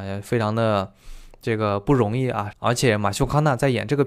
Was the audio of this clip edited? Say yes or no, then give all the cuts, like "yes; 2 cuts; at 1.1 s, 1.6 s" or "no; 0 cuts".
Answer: yes; 1 cut; at 2.5 s